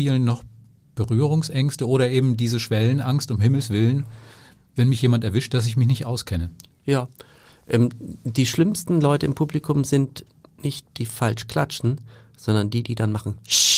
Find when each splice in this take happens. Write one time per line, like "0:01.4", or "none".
0:10.8

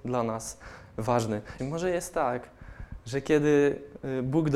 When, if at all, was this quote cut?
0:01.6

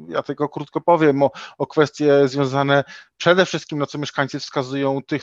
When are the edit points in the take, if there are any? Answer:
none

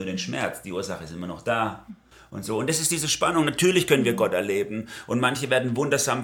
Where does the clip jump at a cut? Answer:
none

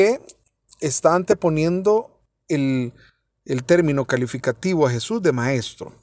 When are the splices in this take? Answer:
none

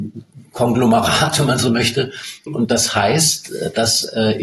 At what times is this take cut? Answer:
0:02.5

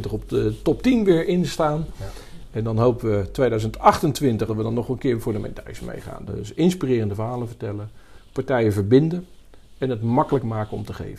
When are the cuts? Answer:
0:04.5
0:06.3

